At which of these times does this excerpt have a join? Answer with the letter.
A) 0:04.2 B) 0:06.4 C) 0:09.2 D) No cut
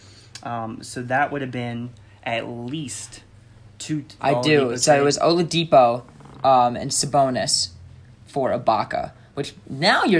A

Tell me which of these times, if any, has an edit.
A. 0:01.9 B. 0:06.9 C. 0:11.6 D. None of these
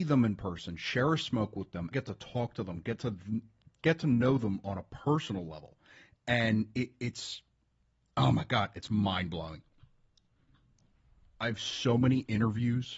A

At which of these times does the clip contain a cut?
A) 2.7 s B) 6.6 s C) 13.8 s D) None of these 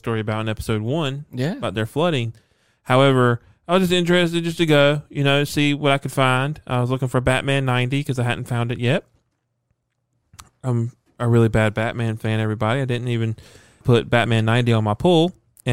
C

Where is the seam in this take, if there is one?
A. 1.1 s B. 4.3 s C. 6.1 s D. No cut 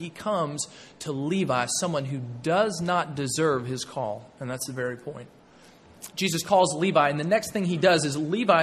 C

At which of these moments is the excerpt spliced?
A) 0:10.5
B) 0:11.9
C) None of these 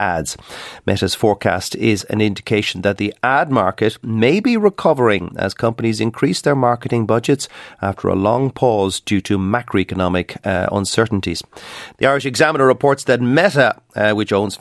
B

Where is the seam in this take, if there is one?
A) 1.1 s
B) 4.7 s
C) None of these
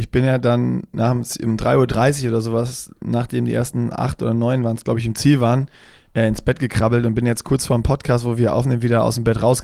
C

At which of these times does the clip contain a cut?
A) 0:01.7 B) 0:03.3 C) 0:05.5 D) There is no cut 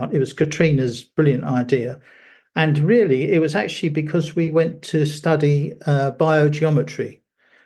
D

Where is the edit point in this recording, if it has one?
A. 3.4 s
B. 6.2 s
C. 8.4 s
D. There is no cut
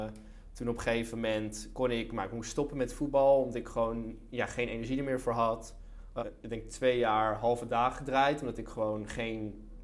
B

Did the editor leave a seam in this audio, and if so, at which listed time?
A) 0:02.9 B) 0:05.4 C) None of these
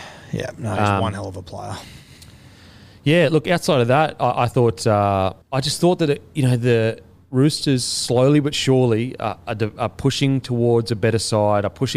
B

